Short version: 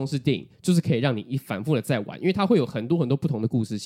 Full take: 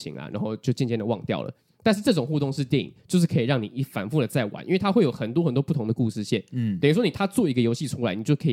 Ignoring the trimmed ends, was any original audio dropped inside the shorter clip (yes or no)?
no